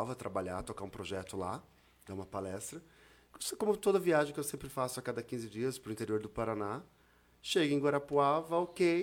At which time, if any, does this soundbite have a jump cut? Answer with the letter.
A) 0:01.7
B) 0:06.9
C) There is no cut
C